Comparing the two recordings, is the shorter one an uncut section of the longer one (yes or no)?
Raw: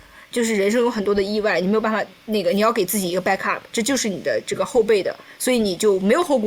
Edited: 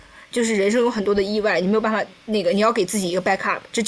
yes